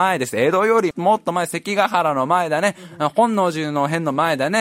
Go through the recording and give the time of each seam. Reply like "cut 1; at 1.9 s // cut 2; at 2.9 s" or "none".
cut 1; at 0.9 s

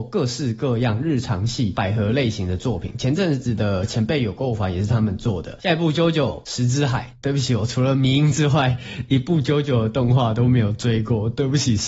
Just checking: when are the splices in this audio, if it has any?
cut 1; at 5.6 s

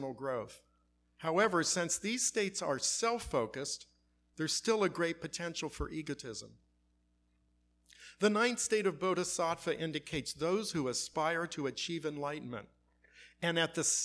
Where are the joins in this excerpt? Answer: none

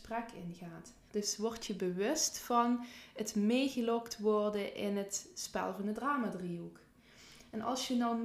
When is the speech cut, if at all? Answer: cut 1; at 1.1 s

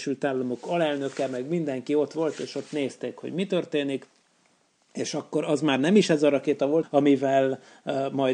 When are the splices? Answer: cut 1; at 6.8 s

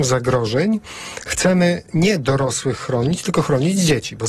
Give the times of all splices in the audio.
none

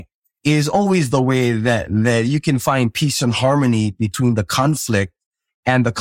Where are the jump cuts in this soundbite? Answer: none

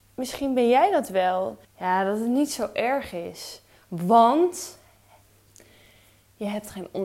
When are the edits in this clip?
cut 1; at 1.6 s

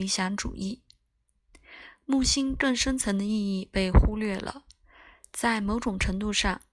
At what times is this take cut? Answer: none

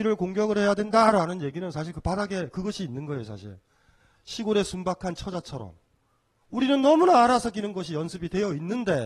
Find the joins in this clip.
cut 1; at 2.5 s

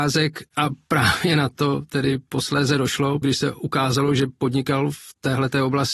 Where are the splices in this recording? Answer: cut 1; at 3.2 s

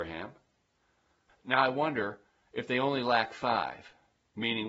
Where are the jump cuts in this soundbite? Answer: cut 1; at 1.3 s

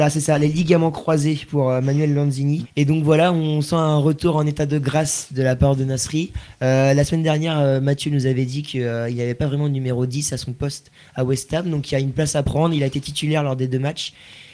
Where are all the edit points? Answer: cut 1; at 2.6 s

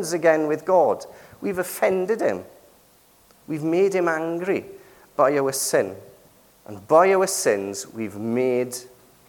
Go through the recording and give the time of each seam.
cut 1; at 6.5 s

